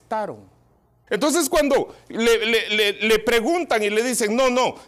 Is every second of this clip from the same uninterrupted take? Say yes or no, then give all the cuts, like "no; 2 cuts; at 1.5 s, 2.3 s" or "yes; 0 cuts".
no; 1 cut; at 1.1 s